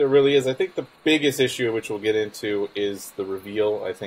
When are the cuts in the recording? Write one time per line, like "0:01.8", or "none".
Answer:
0:01.0